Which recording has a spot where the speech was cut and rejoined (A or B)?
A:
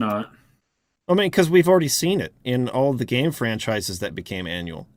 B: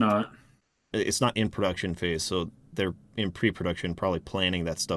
B